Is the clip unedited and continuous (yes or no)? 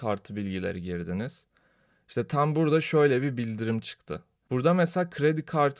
no